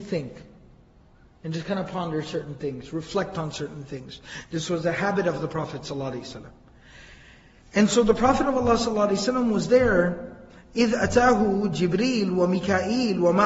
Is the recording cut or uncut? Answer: uncut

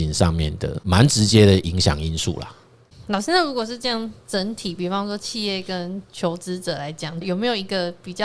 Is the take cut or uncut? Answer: cut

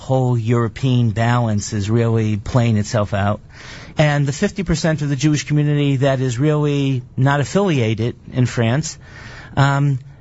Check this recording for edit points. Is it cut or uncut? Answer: cut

